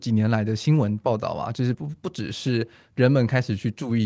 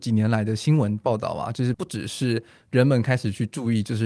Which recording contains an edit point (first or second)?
second